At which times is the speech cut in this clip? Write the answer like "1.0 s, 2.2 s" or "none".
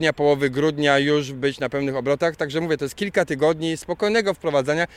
none